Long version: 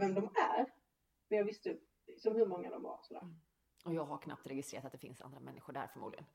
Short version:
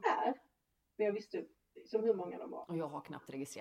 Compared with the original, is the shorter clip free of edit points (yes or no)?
no